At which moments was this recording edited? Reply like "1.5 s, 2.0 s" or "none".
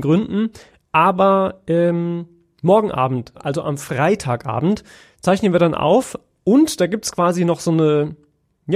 none